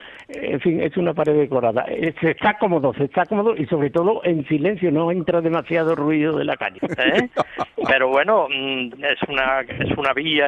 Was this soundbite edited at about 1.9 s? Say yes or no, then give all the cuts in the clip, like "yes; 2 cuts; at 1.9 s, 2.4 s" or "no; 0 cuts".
no; 1 cut; at 6.8 s